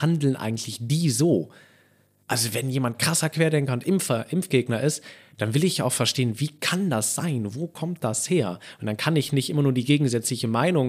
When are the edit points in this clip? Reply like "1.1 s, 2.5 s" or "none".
none

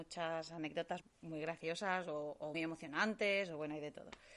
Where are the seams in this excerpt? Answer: 1.0 s, 2.5 s

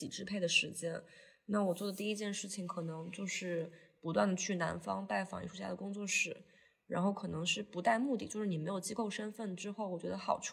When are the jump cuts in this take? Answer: none

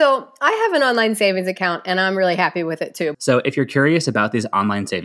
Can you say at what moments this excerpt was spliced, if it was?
3.1 s

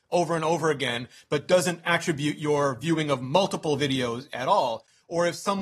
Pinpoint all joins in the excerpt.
none

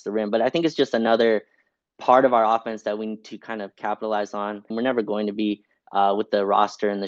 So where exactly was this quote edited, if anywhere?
4.7 s

